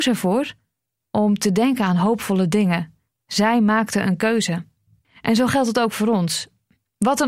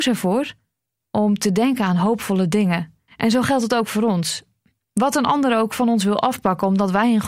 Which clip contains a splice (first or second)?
second